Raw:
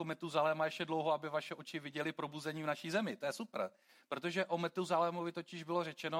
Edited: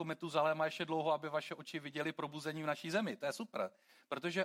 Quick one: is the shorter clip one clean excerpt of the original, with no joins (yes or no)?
yes